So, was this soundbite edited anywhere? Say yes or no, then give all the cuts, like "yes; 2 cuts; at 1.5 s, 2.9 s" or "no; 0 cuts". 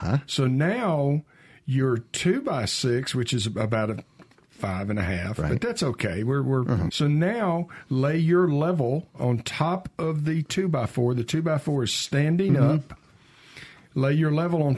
yes; 1 cut; at 6.9 s